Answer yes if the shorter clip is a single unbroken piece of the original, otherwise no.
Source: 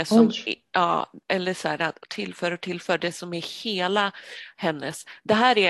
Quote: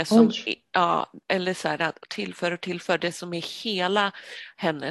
yes